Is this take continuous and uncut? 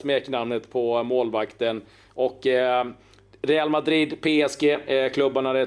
yes; 0 cuts

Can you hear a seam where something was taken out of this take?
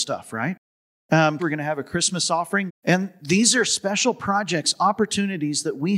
yes; 2 cuts; at 1.4 s, 2.7 s

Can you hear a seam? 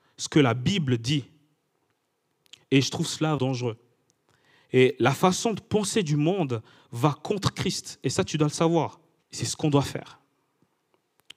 yes; 2 cuts; at 3.4 s, 9.2 s

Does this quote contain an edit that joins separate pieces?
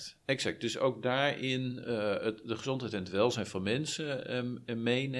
no; 0 cuts

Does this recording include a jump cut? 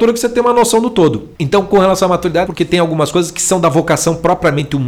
yes; 2 cuts; at 1.3 s, 2.5 s

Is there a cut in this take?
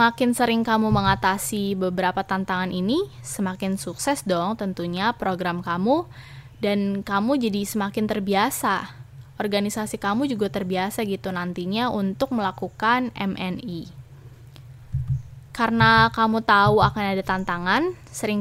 no; 0 cuts

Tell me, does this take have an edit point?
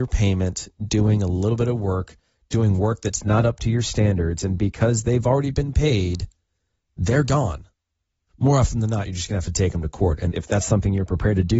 yes; 2 cuts; at 8.3 s, 10.3 s

